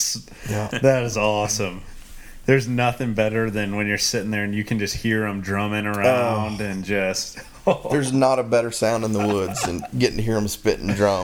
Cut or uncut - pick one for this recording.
uncut